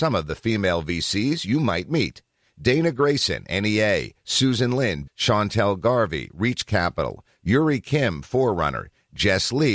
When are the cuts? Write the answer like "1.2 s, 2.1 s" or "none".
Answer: 5.1 s